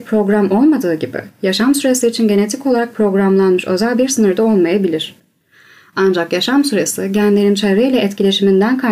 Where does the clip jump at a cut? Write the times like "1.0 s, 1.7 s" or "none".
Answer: none